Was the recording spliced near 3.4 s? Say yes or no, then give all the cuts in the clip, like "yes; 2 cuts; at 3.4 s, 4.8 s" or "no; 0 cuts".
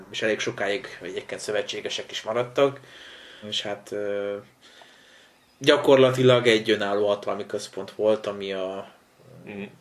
yes; 1 cut; at 3.4 s